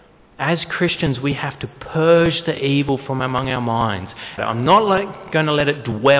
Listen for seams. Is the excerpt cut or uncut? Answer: cut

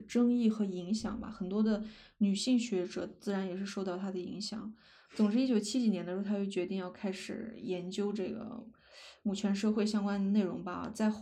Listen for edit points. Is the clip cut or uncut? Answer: cut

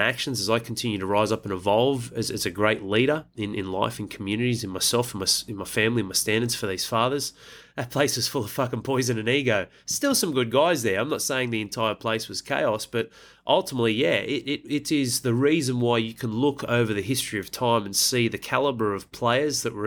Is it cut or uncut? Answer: cut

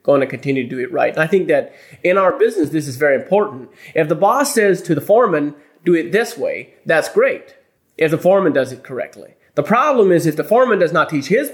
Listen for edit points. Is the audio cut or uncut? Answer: uncut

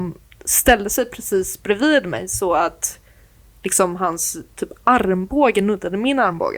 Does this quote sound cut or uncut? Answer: uncut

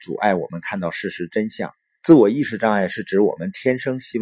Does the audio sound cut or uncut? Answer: cut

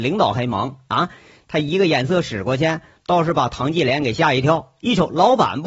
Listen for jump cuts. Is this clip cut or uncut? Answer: uncut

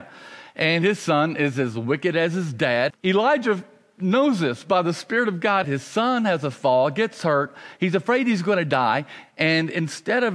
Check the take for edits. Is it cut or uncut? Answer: cut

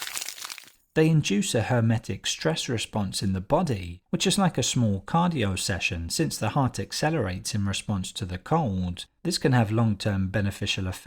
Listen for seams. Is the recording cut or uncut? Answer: uncut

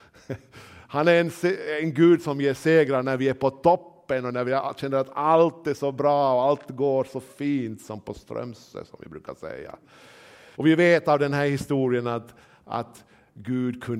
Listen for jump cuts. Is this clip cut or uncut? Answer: cut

